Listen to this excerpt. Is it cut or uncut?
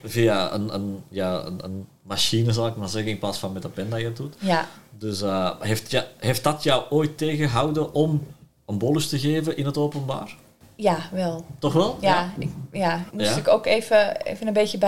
cut